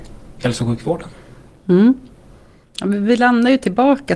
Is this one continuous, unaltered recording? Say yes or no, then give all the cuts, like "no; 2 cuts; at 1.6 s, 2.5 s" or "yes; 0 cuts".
yes; 0 cuts